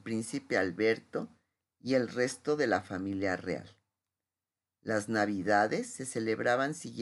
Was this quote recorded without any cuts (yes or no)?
yes